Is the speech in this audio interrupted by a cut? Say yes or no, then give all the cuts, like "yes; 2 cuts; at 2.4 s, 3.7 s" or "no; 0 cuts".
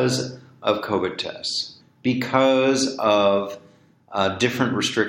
yes; 1 cut; at 1.8 s